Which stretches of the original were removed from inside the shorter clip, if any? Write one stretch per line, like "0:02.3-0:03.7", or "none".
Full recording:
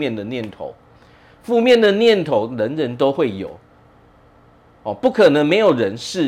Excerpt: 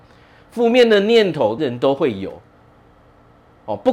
0:02.5-0:02.8